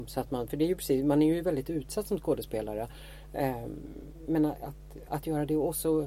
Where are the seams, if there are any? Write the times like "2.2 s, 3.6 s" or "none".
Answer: 5.1 s